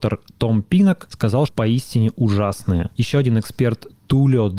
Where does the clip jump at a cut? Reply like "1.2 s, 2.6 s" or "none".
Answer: 1.5 s